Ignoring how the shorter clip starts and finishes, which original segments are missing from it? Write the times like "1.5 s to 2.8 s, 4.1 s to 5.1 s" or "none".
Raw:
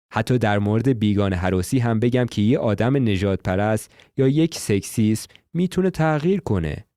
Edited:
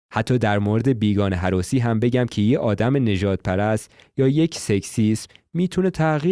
none